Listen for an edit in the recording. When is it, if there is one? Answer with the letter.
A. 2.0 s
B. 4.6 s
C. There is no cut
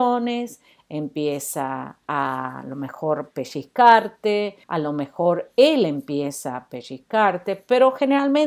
B